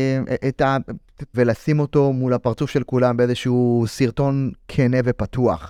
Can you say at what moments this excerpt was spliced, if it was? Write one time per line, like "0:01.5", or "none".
0:01.3